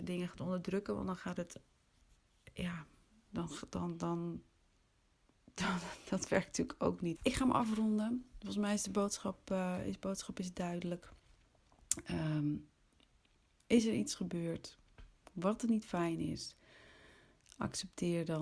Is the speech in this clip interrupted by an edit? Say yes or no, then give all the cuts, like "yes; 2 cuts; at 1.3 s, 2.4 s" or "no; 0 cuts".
yes; 1 cut; at 7.2 s